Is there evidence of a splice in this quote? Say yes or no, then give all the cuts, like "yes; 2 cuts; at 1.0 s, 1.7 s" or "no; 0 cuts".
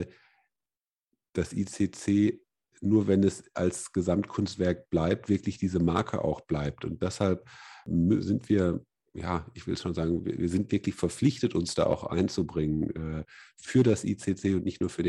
no; 0 cuts